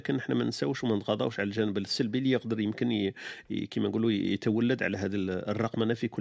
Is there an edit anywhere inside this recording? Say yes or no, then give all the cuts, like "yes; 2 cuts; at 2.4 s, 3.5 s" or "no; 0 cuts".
no; 0 cuts